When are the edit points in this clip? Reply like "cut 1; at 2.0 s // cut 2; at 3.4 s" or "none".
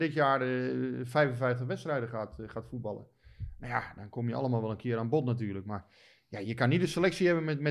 none